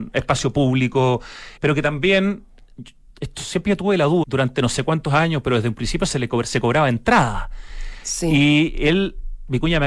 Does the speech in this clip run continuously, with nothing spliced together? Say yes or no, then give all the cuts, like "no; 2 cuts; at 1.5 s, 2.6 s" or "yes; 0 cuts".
no; 2 cuts; at 1.6 s, 4.2 s